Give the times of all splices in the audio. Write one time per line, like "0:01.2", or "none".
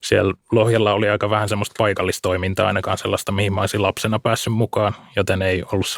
none